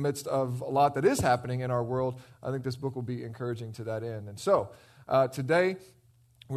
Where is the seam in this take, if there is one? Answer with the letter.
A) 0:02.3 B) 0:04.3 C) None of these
C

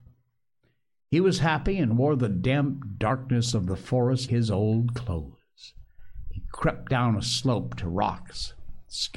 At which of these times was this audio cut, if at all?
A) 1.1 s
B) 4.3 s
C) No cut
B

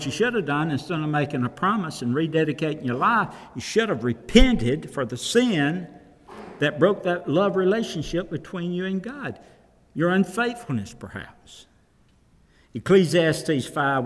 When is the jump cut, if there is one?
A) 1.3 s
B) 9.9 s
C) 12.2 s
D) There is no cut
D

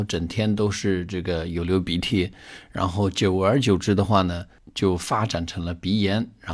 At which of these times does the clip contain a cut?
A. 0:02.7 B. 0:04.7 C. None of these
C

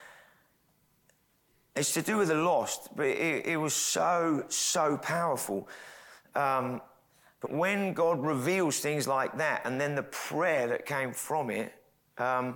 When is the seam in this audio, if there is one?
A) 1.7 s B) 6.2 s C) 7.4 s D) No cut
C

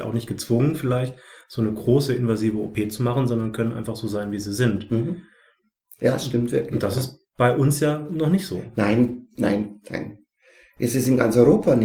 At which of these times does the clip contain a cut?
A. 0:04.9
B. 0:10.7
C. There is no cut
C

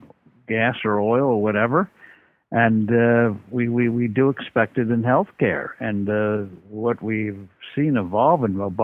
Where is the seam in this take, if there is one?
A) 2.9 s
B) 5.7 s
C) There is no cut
C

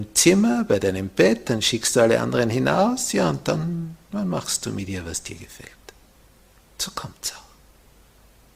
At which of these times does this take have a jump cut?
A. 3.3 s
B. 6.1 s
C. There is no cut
C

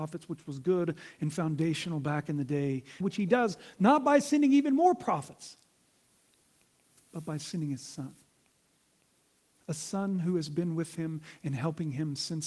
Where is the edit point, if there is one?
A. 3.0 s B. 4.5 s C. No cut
A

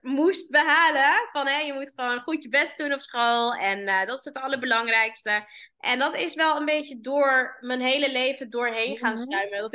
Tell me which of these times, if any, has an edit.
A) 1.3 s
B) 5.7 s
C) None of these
B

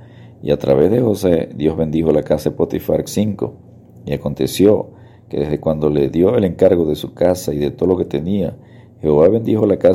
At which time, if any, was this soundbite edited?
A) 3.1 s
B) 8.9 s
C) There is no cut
A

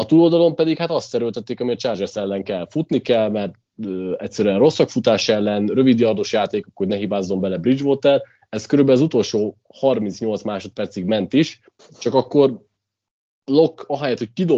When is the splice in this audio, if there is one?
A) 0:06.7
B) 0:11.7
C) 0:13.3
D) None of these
D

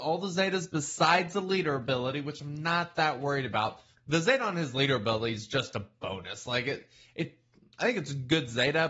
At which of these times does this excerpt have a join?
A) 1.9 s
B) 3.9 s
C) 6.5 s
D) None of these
B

